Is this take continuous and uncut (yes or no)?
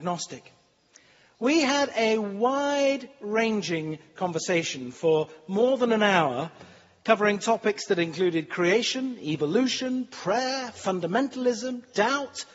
yes